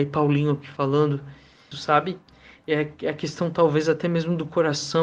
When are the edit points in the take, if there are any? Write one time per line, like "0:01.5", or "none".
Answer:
0:01.7